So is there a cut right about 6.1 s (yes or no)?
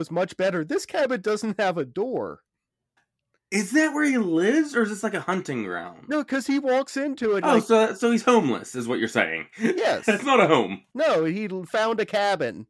no